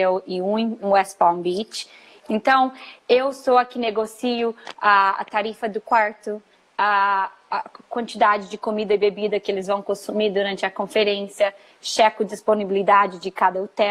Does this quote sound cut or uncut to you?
cut